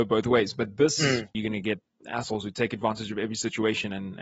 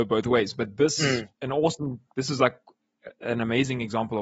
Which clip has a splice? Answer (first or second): first